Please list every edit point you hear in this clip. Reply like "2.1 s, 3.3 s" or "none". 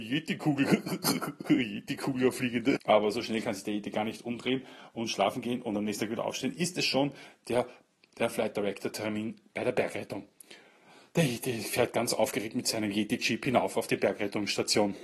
2.8 s